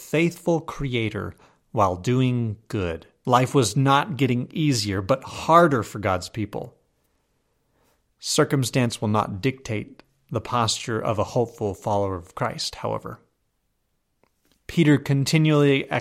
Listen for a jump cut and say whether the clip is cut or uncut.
cut